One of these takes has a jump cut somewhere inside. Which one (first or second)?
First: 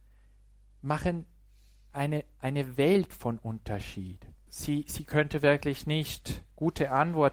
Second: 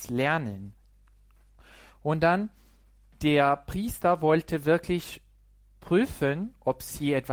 first